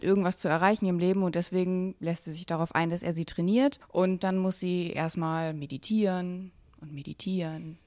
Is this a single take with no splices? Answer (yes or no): yes